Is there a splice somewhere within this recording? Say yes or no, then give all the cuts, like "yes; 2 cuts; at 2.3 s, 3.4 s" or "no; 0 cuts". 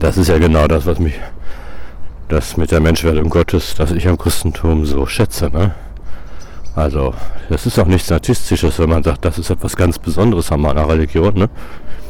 no; 0 cuts